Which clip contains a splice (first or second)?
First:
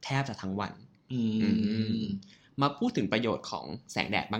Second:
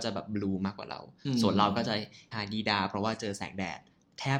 second